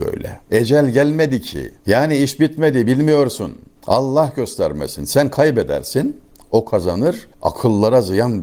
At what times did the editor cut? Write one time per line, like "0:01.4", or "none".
none